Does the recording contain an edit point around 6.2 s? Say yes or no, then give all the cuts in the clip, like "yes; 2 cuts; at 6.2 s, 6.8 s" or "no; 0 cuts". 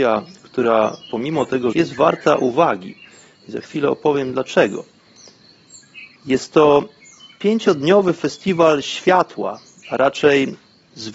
yes; 2 cuts; at 1.7 s, 6.2 s